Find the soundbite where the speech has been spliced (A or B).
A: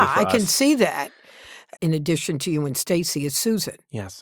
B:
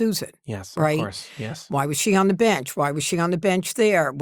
A